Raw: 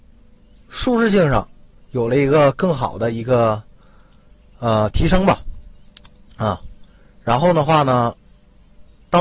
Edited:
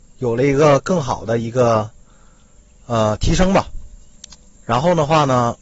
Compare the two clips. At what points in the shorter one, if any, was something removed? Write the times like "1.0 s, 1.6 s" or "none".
4.6 s